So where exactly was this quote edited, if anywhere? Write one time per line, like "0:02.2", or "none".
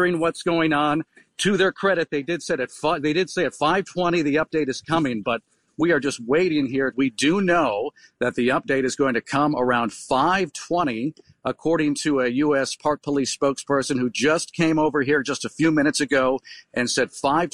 0:06.9